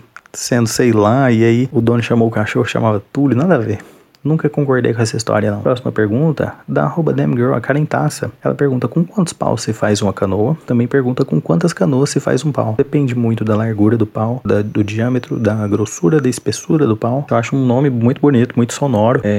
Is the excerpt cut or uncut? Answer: cut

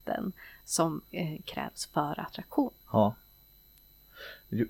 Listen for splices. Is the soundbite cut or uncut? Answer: cut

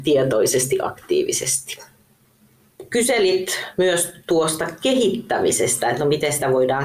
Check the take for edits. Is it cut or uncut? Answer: uncut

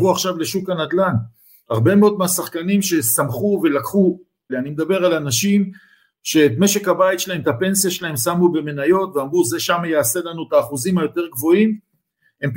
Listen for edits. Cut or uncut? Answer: cut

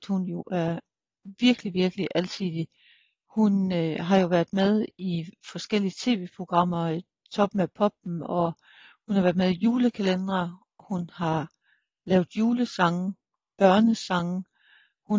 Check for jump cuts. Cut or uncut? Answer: uncut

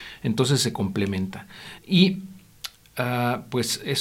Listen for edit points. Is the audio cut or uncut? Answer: uncut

